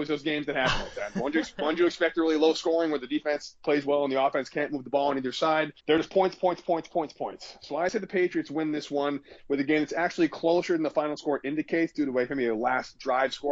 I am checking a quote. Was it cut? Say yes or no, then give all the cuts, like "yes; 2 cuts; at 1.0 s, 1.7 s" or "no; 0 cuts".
yes; 1 cut; at 5.8 s